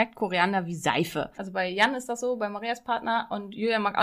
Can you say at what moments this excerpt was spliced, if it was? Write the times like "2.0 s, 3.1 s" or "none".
1.4 s